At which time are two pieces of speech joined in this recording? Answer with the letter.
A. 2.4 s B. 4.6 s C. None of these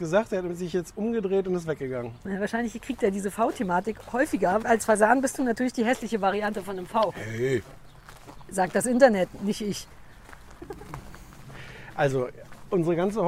B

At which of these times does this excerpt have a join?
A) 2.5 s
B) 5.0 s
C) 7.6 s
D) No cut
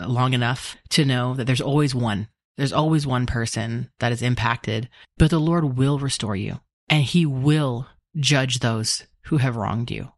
B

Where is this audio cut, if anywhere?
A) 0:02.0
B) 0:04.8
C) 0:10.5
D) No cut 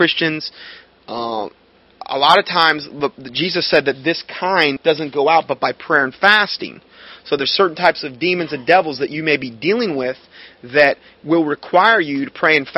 B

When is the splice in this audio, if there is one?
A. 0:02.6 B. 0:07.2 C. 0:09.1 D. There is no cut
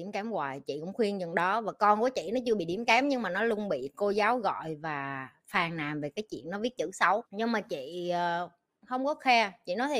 B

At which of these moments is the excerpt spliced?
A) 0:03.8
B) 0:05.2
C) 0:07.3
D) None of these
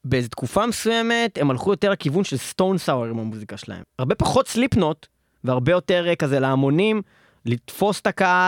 A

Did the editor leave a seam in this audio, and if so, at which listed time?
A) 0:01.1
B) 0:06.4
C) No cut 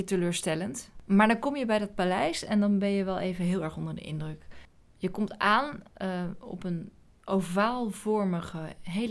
C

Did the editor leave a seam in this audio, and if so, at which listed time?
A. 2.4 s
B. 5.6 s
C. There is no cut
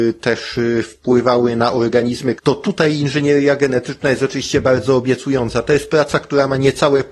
A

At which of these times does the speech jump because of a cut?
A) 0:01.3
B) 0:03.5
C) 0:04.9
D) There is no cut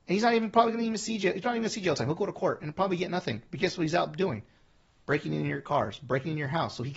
D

